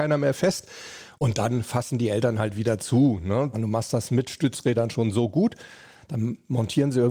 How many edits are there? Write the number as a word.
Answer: one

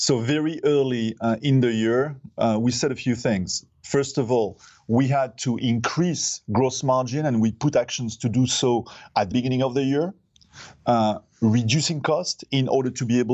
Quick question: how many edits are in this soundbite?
one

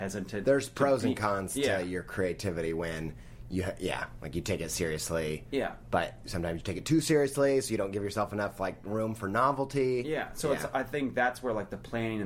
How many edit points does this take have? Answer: zero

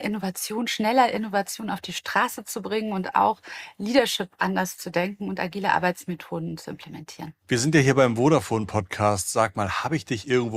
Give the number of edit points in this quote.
one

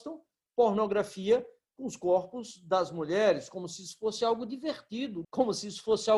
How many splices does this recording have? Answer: one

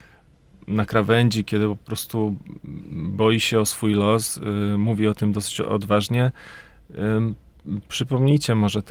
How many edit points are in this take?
zero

